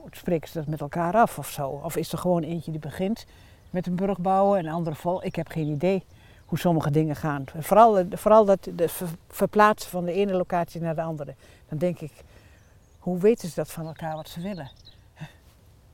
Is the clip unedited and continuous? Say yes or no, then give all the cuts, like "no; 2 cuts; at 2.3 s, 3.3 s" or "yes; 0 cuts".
yes; 0 cuts